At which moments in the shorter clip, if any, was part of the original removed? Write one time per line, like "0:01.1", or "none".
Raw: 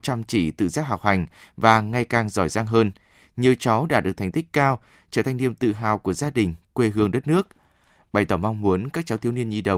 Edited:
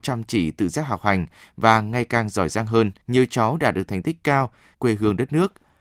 0:03.0
0:04.7

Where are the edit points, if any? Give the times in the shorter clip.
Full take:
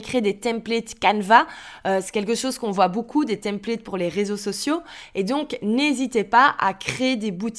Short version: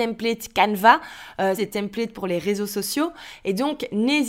0:01.6

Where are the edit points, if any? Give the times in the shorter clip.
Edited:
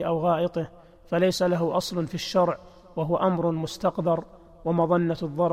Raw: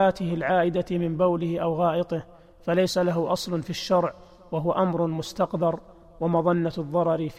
none

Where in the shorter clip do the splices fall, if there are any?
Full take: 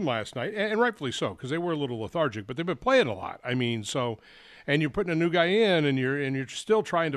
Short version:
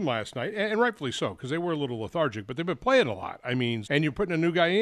0:03.8

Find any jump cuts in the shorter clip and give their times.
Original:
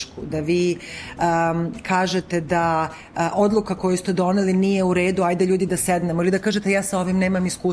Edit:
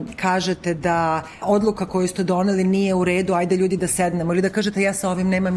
0:01.4

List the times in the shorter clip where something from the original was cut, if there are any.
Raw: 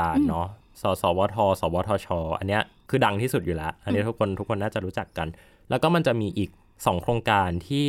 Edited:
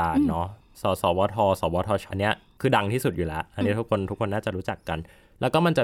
0:02.1

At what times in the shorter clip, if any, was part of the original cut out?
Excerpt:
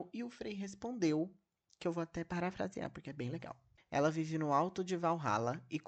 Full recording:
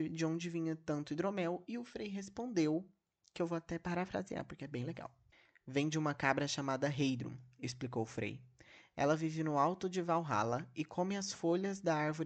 0:03.8

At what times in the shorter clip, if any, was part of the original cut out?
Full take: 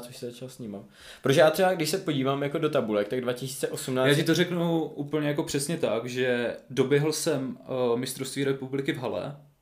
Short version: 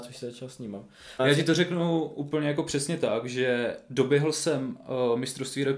0:01.2

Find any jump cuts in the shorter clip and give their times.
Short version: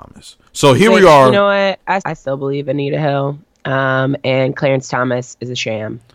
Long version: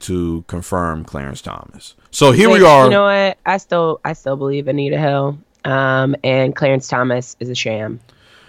0:02.0

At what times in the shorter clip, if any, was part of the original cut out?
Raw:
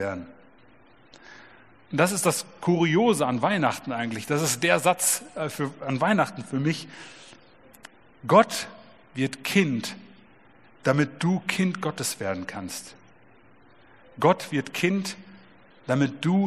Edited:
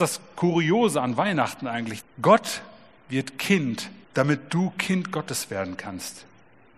0:02.0
0:04.0

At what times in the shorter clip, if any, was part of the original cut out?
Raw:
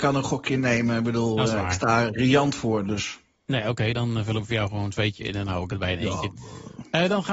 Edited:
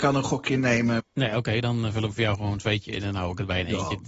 0:01.0

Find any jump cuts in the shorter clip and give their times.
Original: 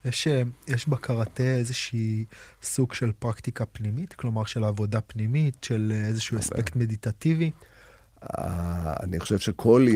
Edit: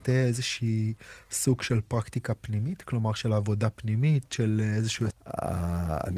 0:05.1

